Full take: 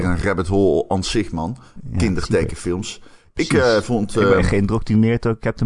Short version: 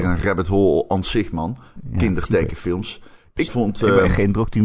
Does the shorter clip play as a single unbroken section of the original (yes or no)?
no